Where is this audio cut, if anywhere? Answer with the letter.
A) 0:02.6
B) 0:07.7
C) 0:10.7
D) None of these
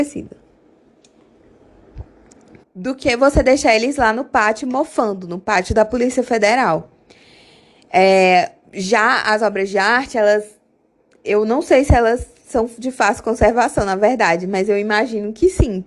A